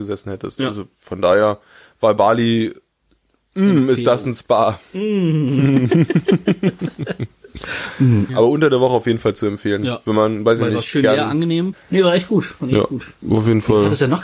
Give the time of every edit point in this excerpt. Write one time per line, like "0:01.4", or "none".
0:08.3
0:11.7

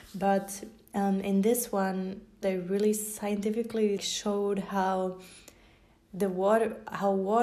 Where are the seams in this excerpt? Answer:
0:02.4
0:04.0

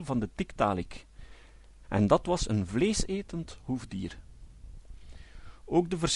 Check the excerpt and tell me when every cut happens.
0:01.8

